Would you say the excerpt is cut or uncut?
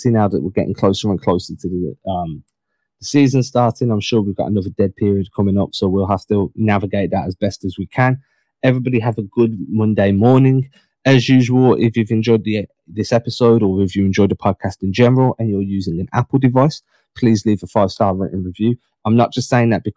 uncut